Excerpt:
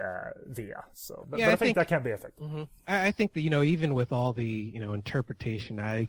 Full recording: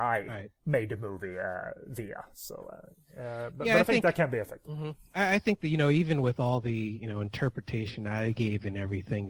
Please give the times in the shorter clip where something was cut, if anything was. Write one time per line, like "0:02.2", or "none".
0:01.2